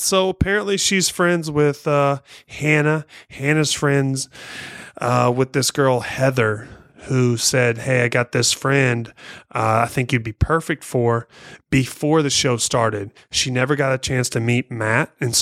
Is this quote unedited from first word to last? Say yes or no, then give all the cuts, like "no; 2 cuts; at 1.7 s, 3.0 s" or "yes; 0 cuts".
yes; 0 cuts